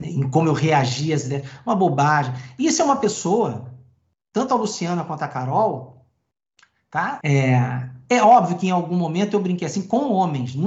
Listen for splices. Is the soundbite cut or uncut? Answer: cut